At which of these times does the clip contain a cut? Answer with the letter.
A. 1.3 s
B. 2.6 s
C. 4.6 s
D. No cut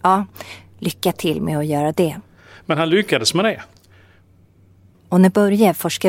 D